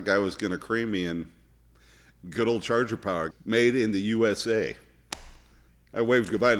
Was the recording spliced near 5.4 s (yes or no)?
no